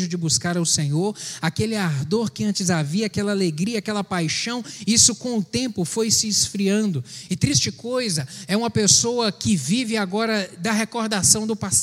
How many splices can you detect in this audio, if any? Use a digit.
0